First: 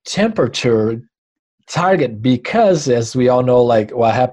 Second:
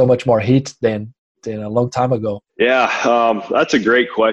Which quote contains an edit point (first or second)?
second